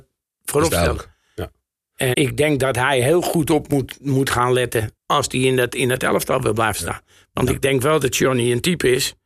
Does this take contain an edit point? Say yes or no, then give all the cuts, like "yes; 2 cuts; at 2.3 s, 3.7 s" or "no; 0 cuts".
yes; 2 cuts; at 2.1 s, 5.0 s